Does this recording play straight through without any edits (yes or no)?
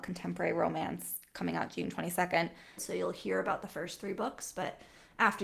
no